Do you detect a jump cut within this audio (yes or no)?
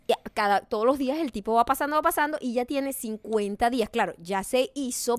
no